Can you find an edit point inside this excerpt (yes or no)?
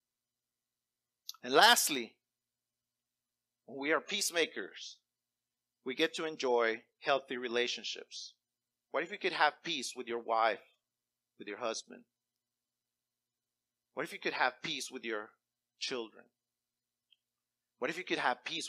yes